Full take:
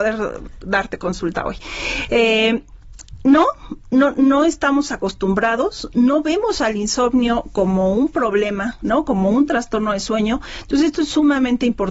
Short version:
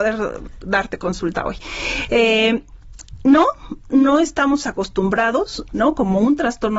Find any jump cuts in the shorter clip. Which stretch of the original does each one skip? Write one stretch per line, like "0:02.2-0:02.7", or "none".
0:03.9-0:04.1
0:05.9-0:08.8

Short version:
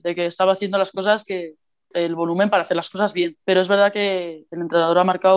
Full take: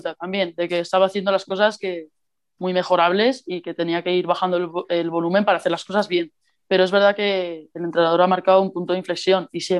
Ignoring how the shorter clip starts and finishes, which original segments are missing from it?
0:02.4-0:04.9
0:06.4-0:06.7

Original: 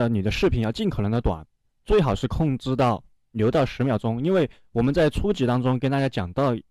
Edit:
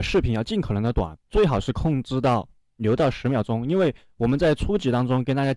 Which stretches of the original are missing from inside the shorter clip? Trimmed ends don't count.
0:01.5-0:01.8

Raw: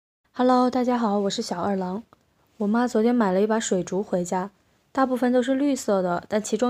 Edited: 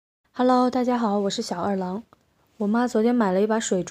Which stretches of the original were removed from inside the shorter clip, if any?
none

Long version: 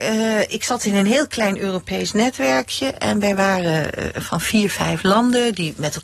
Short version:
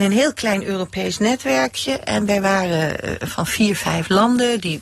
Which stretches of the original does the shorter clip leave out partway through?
none

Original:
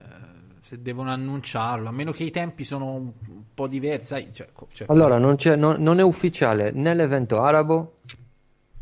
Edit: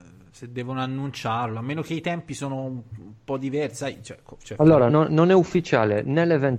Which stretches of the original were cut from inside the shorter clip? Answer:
0:05.2-0:05.6

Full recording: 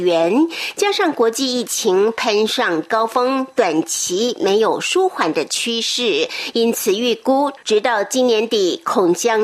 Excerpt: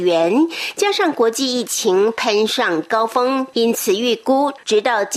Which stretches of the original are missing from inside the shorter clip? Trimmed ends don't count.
0:03.5-0:06.5

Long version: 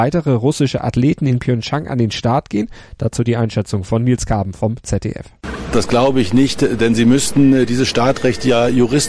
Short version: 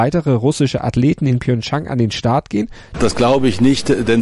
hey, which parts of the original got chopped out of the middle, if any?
0:02.9-0:05.7

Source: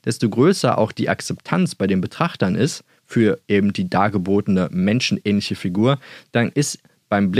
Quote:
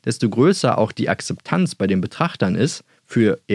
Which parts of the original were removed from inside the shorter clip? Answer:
none

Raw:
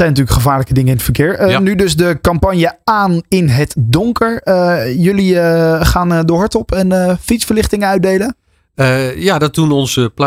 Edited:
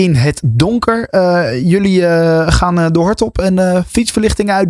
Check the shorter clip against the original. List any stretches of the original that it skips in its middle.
none

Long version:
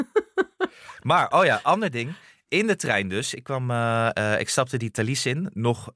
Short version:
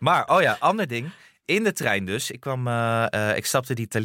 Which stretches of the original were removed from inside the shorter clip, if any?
none

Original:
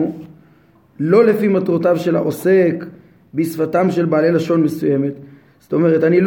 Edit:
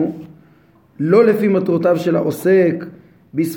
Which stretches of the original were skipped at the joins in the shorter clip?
none

